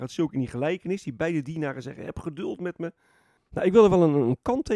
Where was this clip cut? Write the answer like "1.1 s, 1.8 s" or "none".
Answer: 3.4 s

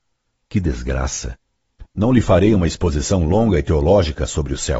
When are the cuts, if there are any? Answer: 1.9 s

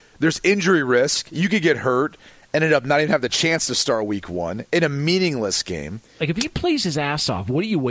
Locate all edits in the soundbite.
6.2 s

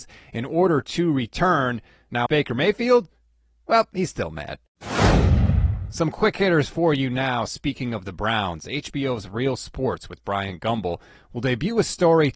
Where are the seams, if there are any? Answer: 2.3 s

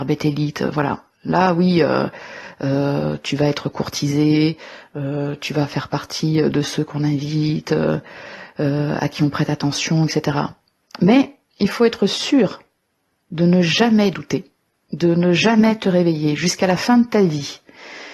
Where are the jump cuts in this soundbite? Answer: none

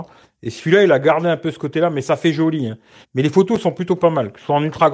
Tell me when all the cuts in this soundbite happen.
3.0 s

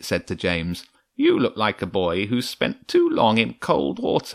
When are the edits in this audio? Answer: none

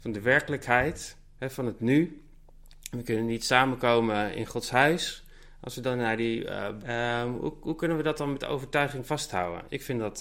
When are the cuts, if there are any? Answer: 6.8 s

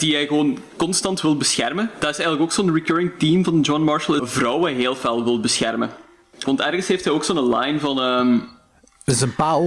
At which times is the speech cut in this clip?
4.2 s, 6.5 s

